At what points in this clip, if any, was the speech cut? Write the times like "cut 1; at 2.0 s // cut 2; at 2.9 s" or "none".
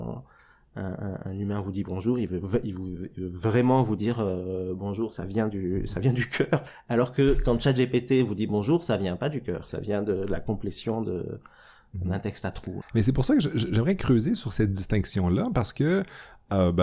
cut 1; at 12.8 s